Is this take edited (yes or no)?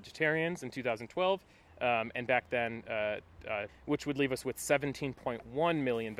yes